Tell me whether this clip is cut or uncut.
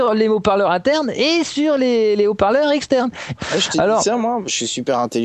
cut